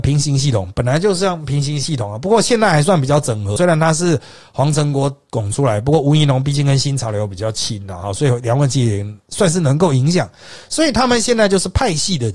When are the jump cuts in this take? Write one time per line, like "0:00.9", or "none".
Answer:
0:03.6